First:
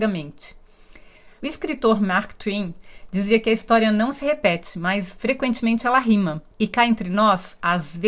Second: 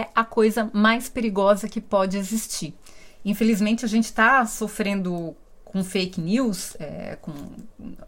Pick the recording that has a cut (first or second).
first